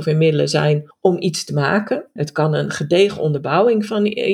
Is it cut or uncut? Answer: cut